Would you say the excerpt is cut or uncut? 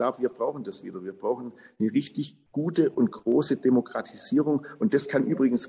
uncut